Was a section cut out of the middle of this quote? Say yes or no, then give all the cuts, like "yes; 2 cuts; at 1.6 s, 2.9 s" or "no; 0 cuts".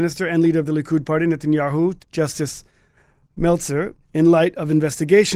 yes; 2 cuts; at 2.0 s, 4.0 s